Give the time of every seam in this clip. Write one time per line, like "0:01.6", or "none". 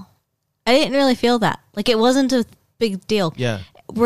none